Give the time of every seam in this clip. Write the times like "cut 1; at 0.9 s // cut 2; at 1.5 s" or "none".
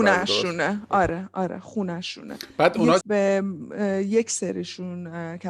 cut 1; at 3.0 s